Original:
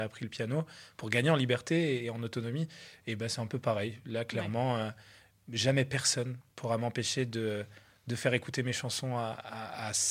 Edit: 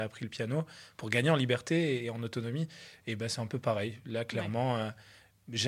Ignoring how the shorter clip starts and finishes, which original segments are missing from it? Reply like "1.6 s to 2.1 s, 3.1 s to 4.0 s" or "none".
none